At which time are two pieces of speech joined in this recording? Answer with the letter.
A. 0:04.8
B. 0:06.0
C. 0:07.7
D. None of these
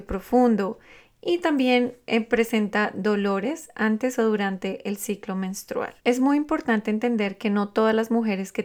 B